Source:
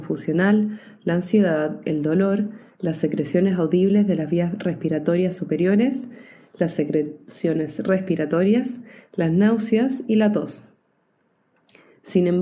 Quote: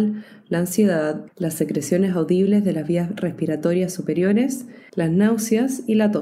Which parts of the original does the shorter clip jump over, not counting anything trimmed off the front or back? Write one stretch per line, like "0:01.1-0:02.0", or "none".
0:01.8-0:02.7
0:06.3-0:09.1